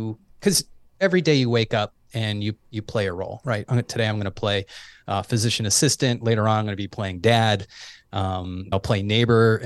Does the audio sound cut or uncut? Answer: cut